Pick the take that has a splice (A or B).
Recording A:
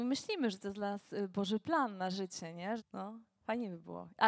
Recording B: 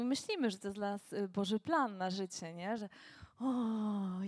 A